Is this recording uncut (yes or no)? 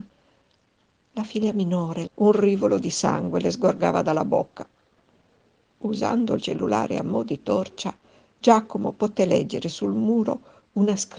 no